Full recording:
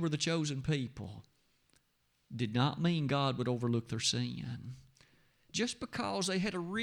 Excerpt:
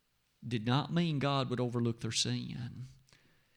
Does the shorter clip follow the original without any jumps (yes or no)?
yes